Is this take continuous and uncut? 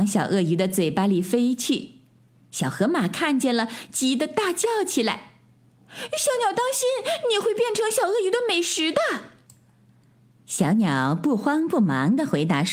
yes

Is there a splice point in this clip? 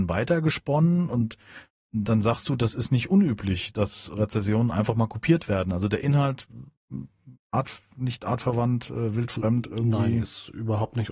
no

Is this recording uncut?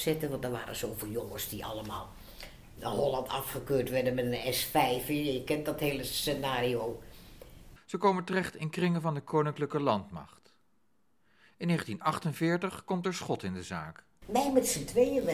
no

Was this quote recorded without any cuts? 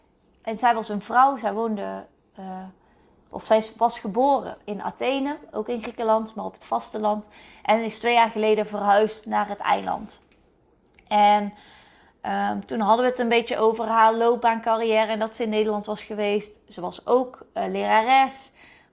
yes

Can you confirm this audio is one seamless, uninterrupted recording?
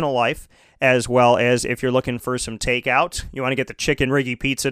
yes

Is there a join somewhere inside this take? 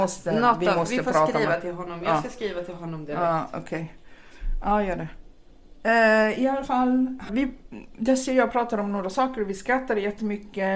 yes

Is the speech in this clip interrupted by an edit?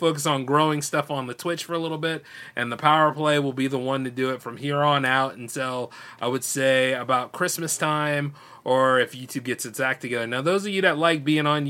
no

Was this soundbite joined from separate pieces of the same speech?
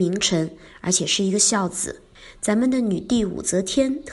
no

